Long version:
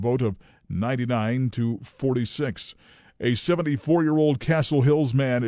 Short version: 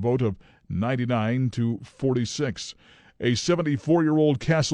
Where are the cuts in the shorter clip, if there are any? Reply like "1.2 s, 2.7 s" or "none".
none